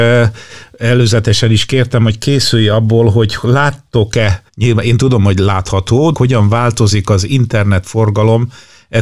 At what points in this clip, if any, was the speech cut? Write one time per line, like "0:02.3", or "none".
0:04.5
0:06.1